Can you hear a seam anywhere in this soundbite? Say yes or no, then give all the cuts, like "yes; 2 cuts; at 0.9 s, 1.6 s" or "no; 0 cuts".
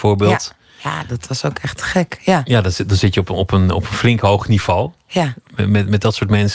no; 0 cuts